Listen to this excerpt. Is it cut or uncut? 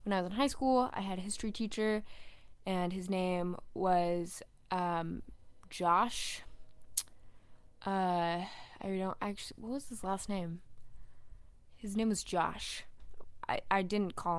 uncut